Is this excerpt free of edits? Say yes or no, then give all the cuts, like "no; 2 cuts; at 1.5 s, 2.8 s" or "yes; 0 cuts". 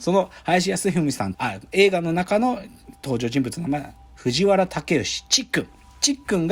no; 1 cut; at 1.3 s